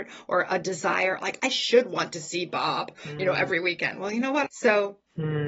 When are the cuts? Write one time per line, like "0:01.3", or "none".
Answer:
0:04.5